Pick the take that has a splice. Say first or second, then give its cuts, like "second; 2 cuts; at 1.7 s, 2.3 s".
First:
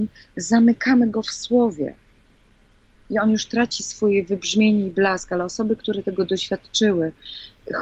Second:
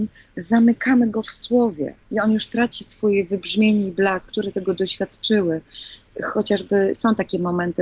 second; 2 cuts; at 2.0 s, 4.3 s